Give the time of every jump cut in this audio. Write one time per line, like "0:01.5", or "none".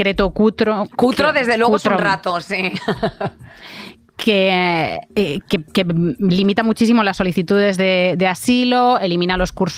none

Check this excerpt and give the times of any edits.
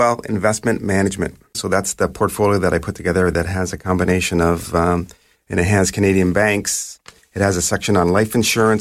0:01.5
0:05.3

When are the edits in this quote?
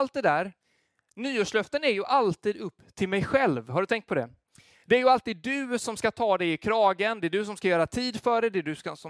none

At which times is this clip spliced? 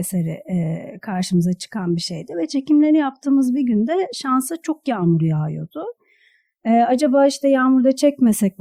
none

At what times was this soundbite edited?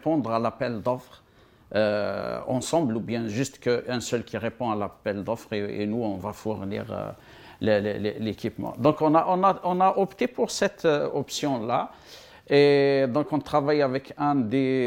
none

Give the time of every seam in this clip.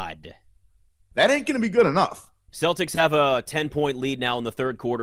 0:01.1
0:02.5

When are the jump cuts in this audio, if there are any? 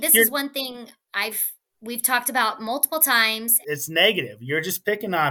0:03.6

